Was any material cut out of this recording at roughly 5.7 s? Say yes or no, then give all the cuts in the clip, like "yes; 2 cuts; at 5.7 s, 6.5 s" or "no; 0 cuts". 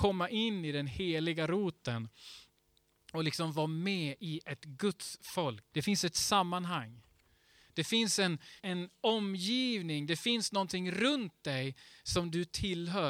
yes; 2 cuts; at 5.7 s, 8.6 s